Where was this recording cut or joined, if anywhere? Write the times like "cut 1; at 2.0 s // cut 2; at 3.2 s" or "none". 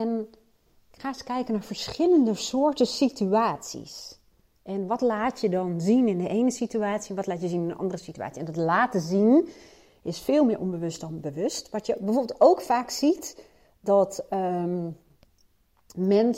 none

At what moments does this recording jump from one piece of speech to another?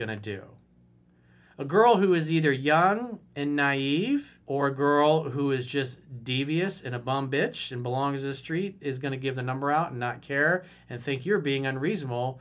cut 1; at 4.4 s

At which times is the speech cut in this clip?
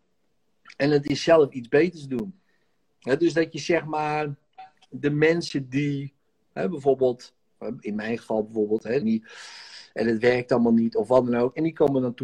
cut 1; at 9.0 s

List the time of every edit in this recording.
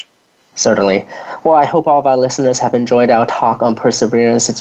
none

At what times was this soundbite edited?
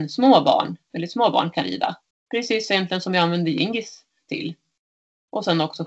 cut 1; at 2.1 s

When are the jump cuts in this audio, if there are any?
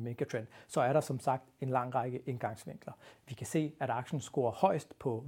cut 1; at 3.1 s

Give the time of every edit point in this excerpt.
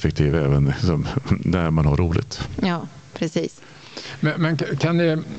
none

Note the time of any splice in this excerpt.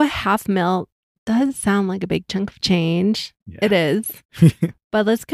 none

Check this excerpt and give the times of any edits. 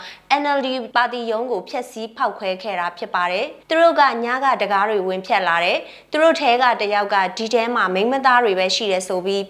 cut 1; at 3.6 s

